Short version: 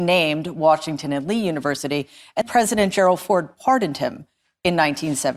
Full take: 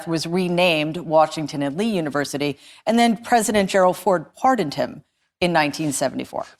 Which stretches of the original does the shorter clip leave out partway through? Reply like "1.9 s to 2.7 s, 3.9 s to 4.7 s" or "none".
2.9 s to 3.2 s

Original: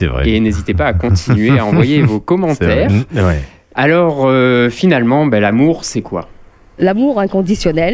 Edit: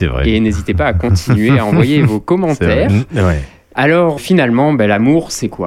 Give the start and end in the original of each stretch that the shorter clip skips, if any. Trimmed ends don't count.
4.2 s to 4.7 s

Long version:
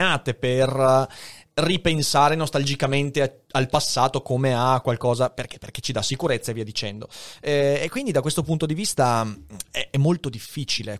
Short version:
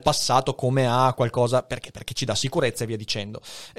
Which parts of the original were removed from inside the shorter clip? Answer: none

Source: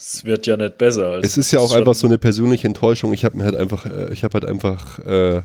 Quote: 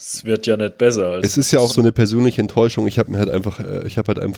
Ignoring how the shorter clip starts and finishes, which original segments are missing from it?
1.7 s to 1.9 s

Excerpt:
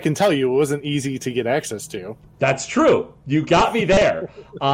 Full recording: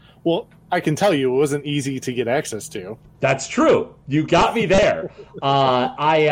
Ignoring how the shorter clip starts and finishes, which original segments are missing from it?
none

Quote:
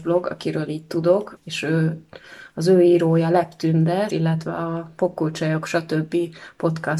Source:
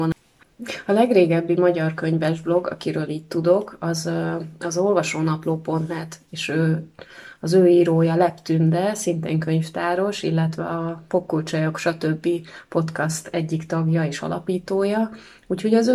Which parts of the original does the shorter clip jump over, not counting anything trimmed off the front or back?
3.8 s to 6.2 s, 9.0 s to 10.2 s

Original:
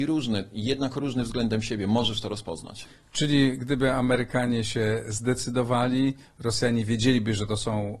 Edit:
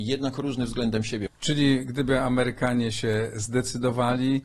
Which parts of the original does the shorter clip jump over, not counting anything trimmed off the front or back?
1.8 s to 3.0 s

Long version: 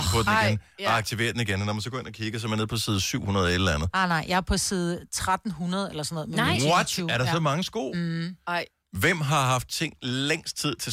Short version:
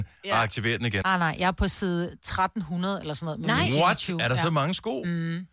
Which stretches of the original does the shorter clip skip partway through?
1.6 s to 3.9 s

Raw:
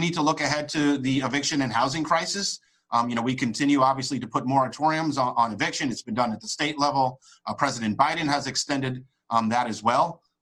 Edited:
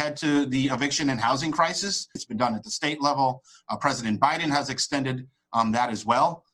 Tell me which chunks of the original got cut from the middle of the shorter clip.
2.7 s to 5.9 s

